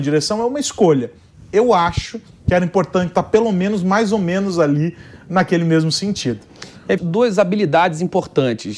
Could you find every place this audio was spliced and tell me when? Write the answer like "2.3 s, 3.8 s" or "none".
7.0 s